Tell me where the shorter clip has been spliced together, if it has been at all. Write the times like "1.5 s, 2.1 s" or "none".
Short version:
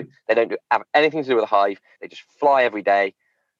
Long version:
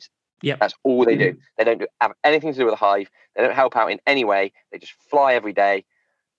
2.0 s